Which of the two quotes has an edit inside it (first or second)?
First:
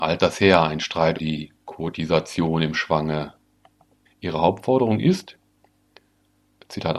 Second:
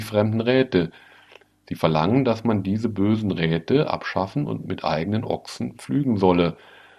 first